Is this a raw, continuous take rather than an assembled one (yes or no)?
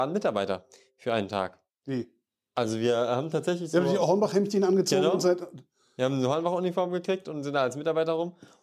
yes